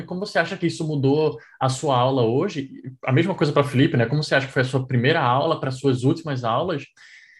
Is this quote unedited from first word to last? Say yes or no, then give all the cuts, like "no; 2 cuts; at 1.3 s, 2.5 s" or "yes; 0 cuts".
yes; 0 cuts